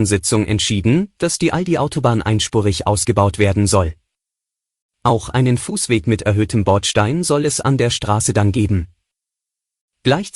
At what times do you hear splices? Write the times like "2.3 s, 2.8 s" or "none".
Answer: none

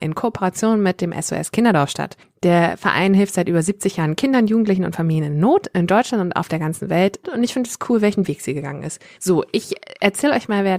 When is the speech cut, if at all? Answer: 7.2 s, 9.2 s

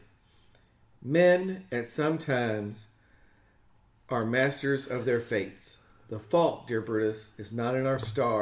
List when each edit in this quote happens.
none

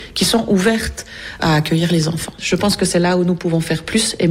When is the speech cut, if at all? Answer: 2.4 s

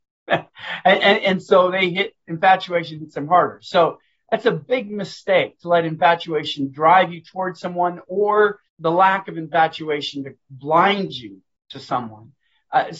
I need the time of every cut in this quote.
8.7 s

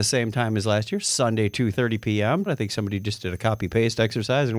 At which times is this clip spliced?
2.5 s

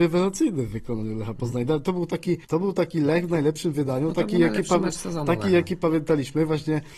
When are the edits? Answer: 2.4 s

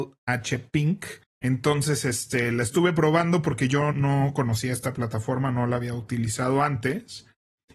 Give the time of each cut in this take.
1.2 s

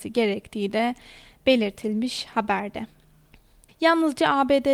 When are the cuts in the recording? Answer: 3.7 s

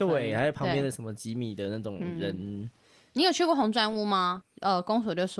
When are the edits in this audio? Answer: 4.4 s

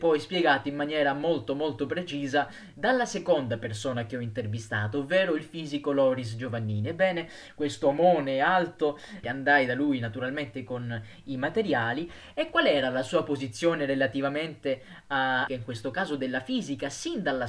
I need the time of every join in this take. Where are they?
9.2 s, 15.5 s

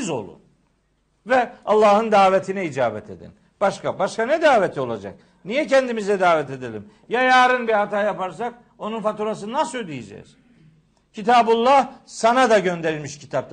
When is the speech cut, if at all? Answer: none

